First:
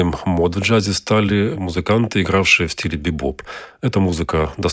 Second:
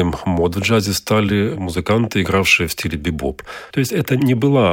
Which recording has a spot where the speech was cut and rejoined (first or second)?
second